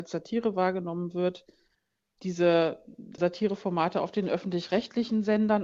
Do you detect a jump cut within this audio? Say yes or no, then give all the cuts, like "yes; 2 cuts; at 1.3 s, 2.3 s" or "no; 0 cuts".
yes; 1 cut; at 3.2 s